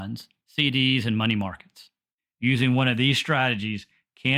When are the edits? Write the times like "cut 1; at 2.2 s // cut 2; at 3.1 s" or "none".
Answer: none